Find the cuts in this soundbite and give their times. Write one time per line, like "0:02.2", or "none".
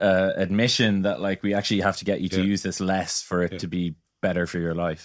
none